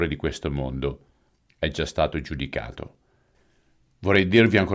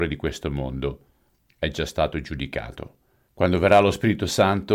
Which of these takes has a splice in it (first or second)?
second